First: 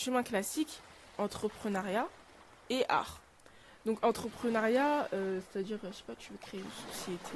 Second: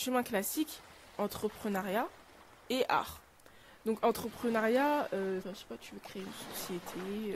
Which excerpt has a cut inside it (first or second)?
second